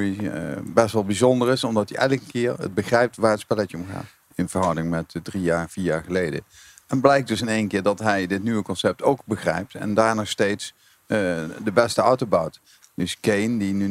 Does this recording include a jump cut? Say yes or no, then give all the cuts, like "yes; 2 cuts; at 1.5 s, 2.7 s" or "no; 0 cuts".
yes; 2 cuts; at 4.2 s, 12.8 s